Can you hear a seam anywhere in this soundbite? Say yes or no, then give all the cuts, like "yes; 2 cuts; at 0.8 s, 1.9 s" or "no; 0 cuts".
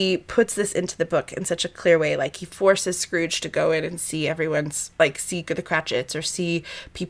no; 0 cuts